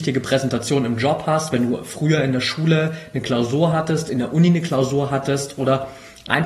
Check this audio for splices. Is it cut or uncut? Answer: uncut